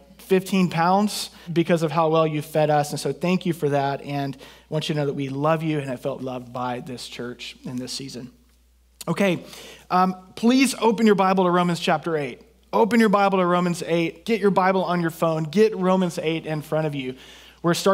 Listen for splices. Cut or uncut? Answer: cut